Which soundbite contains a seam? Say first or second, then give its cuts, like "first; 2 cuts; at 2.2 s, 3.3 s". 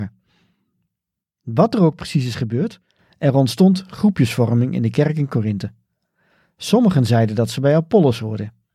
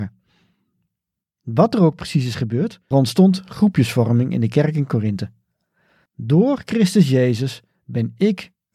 second; 2 cuts; at 2.9 s, 6.1 s